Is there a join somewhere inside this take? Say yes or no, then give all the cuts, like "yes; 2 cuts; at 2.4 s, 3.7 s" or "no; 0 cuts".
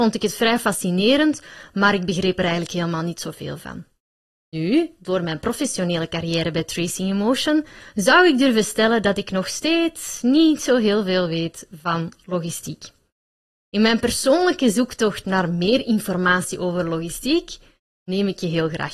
no; 0 cuts